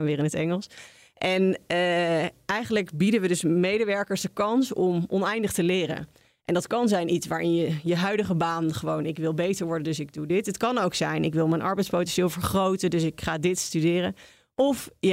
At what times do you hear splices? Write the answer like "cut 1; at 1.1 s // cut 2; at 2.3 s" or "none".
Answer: none